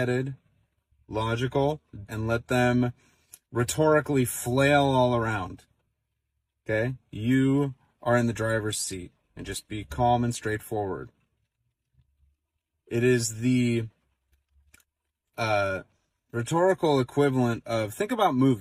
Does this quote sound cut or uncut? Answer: cut